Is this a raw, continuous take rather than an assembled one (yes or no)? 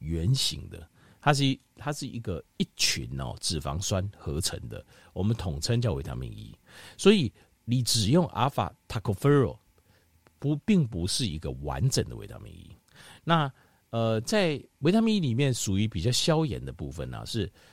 yes